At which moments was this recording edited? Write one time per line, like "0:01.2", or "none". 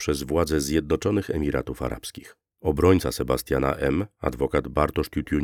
none